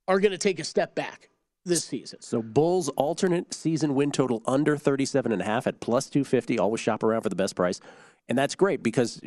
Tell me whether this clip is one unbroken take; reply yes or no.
yes